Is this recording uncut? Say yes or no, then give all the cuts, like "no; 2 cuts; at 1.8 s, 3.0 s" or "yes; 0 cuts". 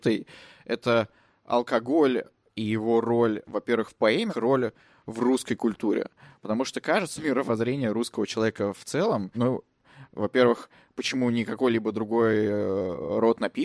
no; 3 cuts; at 4.3 s, 7.2 s, 9.3 s